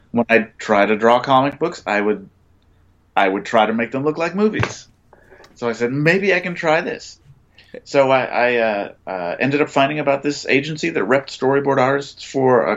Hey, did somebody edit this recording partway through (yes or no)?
no